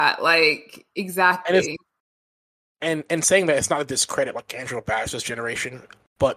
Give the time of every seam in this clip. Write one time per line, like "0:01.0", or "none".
none